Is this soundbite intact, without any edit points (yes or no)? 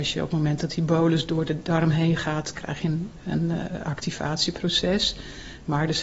yes